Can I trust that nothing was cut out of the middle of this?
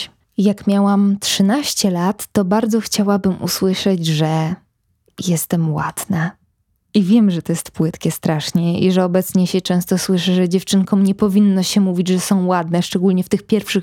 yes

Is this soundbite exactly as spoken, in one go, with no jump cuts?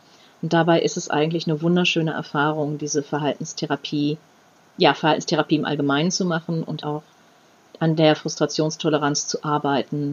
no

